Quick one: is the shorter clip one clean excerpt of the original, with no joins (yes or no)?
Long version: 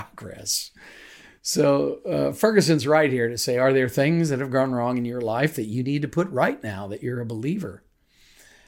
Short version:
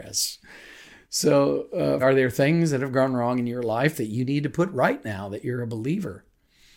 no